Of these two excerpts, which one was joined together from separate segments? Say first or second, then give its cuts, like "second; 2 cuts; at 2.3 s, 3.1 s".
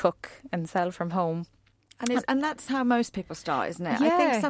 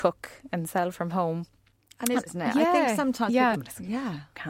second; 2 cuts; at 2.3 s, 3.5 s